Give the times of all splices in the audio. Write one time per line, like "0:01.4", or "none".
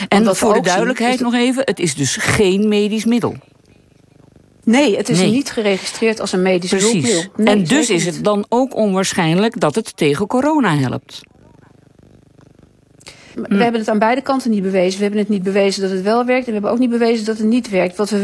0:08.2
0:13.3